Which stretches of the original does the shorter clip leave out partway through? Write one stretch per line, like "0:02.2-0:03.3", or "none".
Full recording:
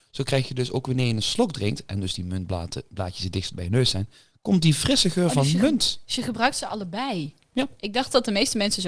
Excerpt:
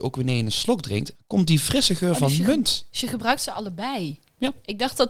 0:01.9-0:04.3